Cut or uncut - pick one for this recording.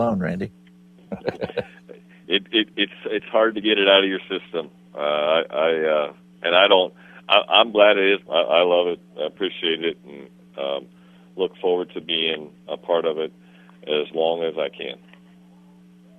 cut